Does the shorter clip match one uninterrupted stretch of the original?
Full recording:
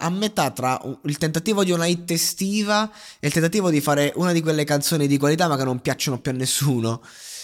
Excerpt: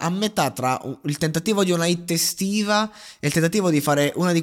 yes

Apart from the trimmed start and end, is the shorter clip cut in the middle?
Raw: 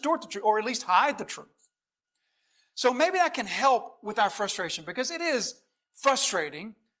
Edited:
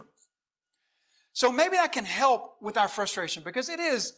no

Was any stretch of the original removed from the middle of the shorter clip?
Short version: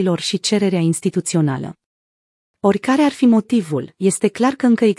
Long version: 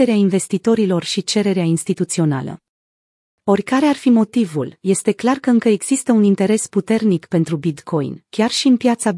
no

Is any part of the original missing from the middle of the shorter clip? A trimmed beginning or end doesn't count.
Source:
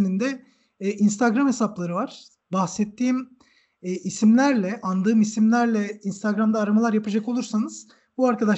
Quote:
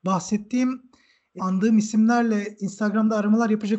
yes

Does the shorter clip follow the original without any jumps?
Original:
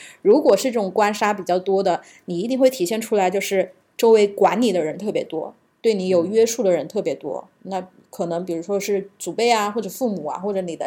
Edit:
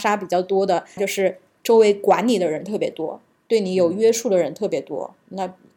no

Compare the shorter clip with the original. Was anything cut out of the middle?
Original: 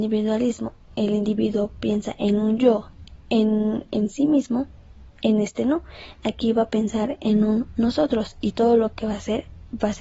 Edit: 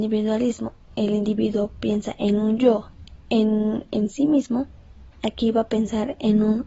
yes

